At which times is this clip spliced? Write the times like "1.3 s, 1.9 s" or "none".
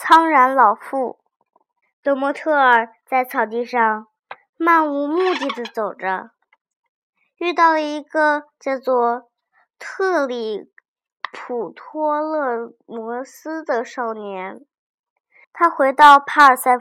1.8 s, 15.4 s

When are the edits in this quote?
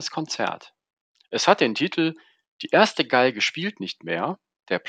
none

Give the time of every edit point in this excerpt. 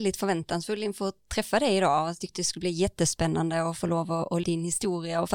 4.4 s

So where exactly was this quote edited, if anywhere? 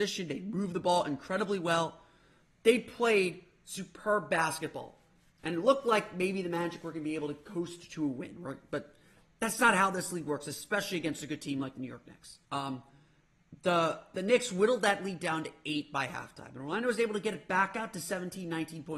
12.4 s

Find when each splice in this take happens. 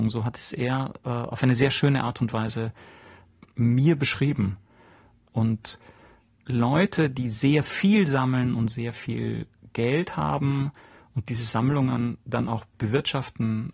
none

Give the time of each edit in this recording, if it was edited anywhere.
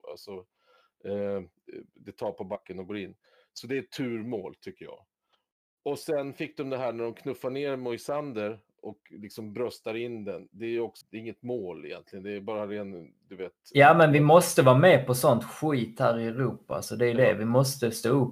11.0 s

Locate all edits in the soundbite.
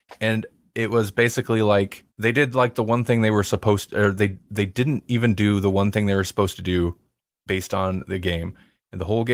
2.1 s

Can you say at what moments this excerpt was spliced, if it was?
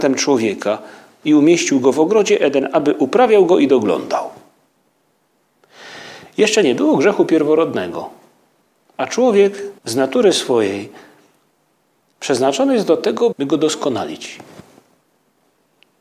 9.8 s, 13.3 s

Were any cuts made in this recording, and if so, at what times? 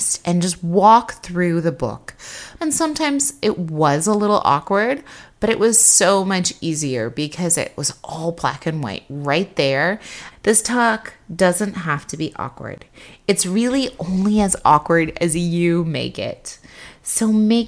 2.6 s, 10.3 s

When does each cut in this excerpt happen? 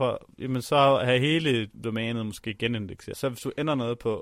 1.7 s, 3.1 s

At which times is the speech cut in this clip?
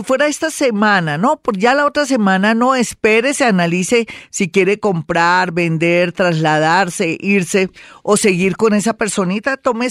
none

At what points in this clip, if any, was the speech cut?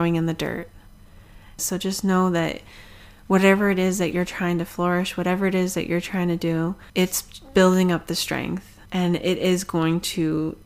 1.6 s, 6.9 s, 8.9 s

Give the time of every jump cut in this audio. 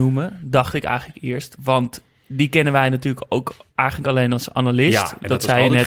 none

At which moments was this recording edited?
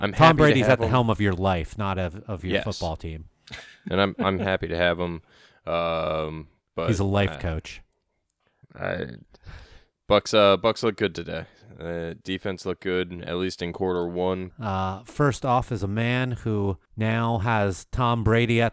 8.6 s, 14.5 s, 16.9 s

